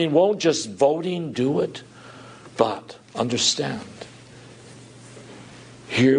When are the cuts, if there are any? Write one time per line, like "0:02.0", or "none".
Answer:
0:02.5